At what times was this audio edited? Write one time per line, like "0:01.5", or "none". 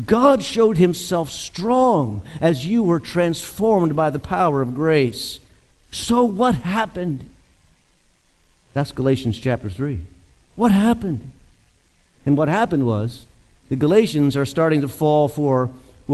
none